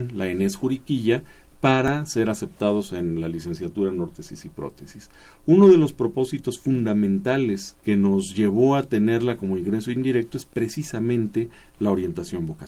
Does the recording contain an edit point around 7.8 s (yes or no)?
yes